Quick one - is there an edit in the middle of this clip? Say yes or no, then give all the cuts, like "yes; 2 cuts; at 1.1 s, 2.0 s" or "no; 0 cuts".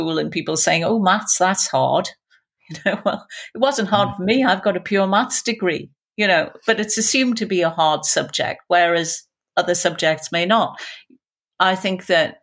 no; 0 cuts